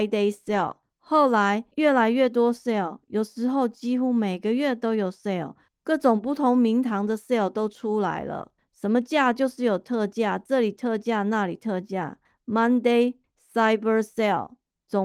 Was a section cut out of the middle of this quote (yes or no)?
no